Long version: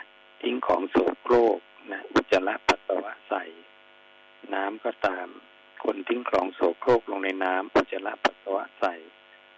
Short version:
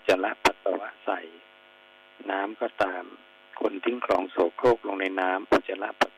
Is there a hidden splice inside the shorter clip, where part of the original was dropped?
no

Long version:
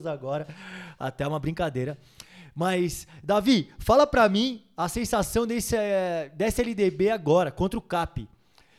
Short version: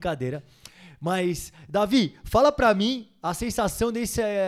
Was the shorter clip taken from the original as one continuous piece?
yes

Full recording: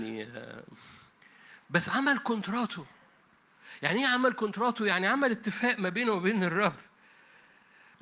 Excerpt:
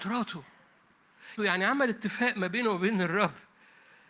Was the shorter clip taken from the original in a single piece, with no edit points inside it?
no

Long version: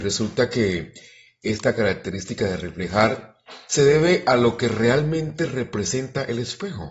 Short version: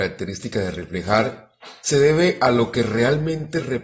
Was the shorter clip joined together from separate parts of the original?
no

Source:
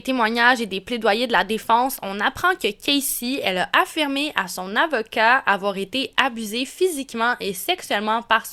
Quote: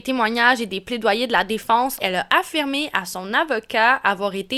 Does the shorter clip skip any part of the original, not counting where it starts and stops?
yes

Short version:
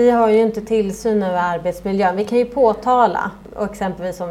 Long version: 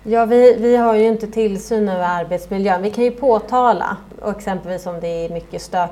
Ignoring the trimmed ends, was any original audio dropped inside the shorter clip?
no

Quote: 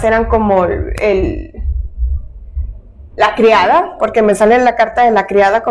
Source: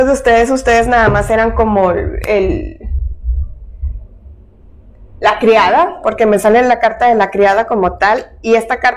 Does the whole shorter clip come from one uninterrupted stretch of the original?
no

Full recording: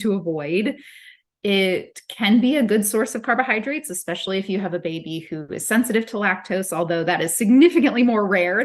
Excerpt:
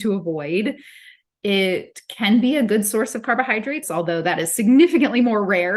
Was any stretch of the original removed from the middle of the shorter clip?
yes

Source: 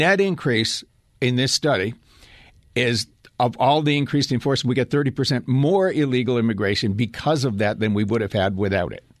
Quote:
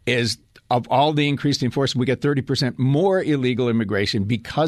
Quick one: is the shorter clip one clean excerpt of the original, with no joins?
yes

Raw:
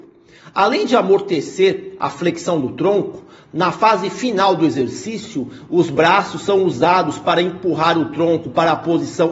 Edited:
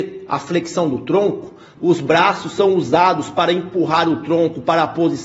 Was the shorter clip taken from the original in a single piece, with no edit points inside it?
no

